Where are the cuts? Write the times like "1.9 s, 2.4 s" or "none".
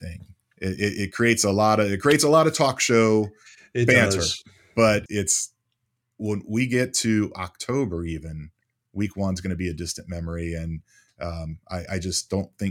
5.1 s